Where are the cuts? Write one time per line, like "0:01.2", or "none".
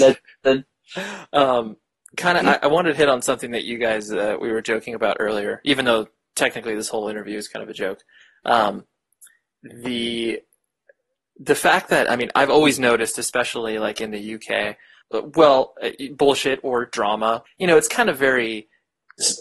0:15.0
0:17.5